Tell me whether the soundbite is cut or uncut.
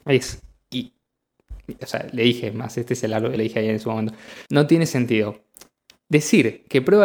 cut